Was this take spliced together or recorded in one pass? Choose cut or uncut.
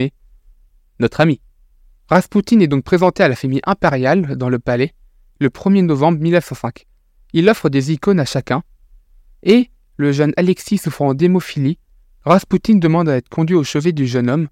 uncut